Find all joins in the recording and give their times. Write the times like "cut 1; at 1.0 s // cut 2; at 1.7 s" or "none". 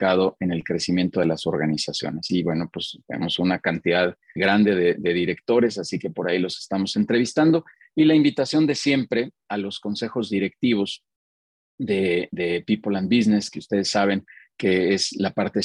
cut 1; at 2.3 s // cut 2; at 4.4 s